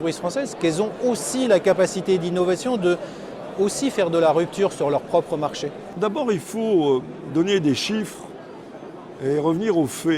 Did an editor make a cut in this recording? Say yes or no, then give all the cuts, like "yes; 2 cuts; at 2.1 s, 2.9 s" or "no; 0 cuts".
yes; 1 cut; at 6.0 s